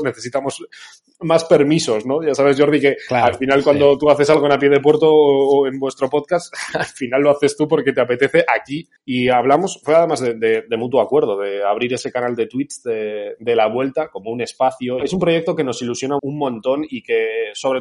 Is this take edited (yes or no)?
yes